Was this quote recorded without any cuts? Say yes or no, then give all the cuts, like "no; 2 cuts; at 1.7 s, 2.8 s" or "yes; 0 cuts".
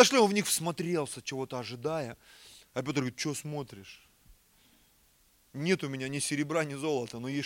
yes; 0 cuts